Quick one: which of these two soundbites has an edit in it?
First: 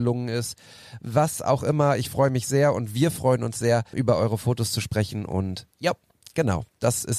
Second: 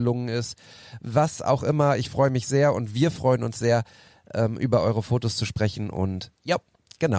first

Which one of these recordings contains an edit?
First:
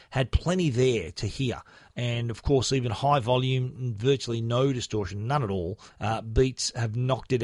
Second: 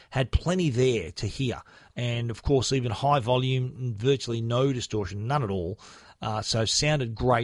first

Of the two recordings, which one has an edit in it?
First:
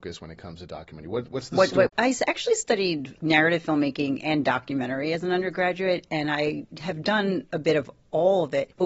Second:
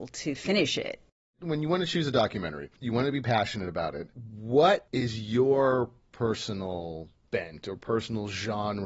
first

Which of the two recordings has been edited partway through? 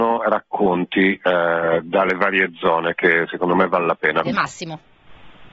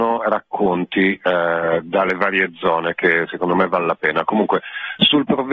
first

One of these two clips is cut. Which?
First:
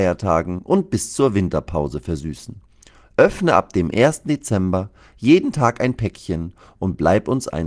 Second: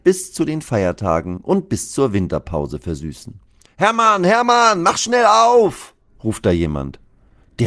second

